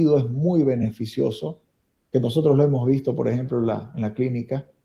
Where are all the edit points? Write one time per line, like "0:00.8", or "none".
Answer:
none